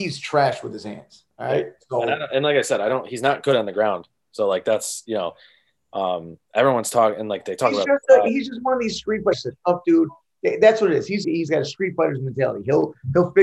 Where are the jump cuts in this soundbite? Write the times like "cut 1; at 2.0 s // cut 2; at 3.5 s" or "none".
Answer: cut 1; at 9.3 s // cut 2; at 11.2 s